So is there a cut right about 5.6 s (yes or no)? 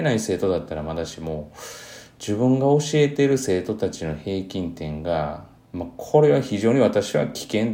yes